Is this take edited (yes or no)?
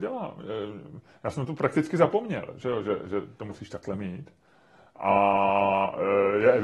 no